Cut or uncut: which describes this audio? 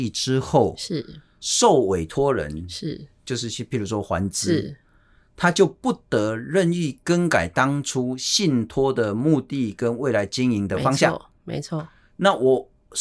uncut